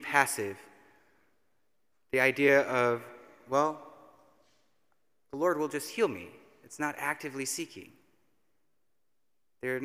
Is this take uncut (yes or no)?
yes